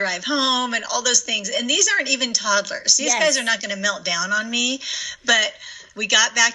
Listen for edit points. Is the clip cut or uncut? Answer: uncut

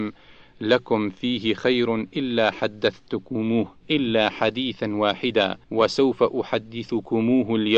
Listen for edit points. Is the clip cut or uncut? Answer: cut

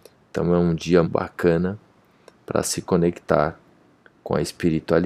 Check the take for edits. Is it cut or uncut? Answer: cut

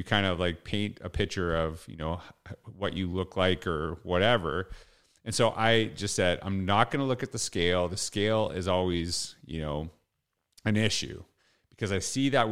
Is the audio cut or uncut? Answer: uncut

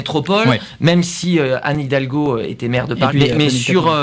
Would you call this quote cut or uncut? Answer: cut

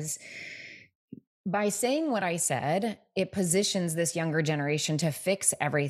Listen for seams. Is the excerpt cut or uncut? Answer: uncut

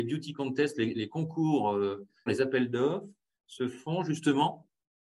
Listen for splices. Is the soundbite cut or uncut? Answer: cut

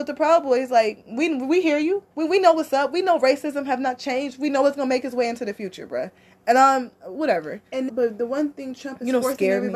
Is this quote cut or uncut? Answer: cut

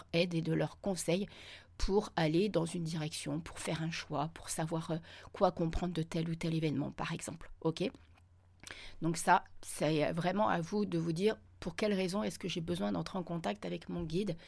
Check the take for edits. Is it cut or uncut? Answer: uncut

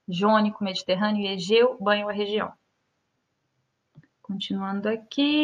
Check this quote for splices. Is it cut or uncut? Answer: uncut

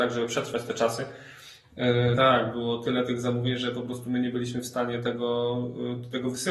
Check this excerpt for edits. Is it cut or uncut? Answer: cut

